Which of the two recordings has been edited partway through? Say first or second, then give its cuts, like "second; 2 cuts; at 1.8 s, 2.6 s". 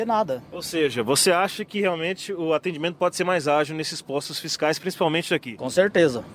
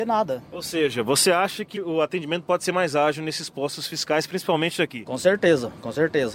second; 1 cut; at 1.8 s